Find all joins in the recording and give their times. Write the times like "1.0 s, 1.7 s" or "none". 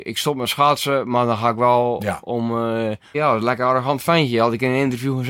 3.1 s